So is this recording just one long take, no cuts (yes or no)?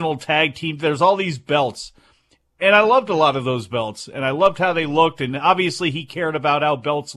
yes